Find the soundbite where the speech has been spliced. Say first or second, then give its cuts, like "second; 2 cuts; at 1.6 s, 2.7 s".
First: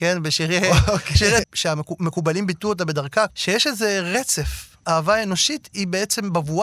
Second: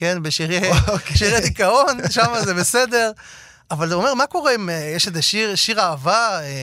first; 2 cuts; at 1.4 s, 3.3 s